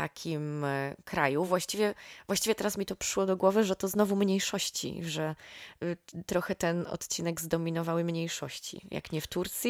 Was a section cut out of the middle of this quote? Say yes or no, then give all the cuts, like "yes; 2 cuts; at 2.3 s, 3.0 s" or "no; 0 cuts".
no; 0 cuts